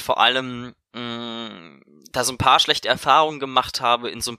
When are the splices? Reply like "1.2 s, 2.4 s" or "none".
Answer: none